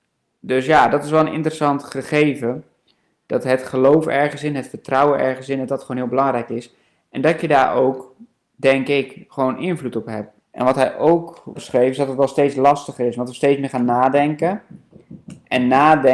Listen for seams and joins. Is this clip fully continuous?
no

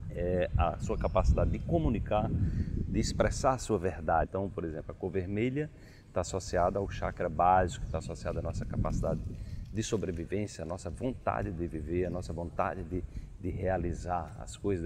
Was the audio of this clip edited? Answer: yes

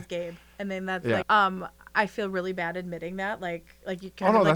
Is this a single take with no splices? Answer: no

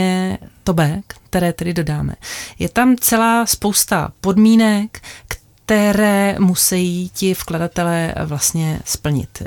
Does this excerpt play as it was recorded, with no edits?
no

